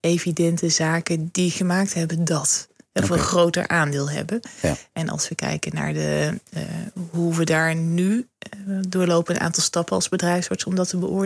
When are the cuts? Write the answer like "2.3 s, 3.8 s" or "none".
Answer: none